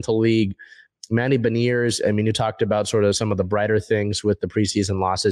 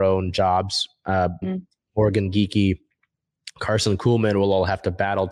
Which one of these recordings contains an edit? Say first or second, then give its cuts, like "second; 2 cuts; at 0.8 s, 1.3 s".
second; 1 cut; at 1.4 s